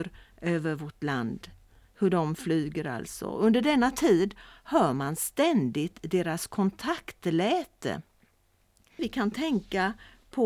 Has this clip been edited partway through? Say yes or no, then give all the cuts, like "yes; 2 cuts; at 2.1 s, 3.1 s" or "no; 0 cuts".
yes; 1 cut; at 9.0 s